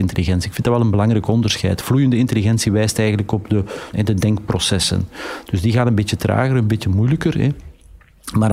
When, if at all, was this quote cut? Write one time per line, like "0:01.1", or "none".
0:03.9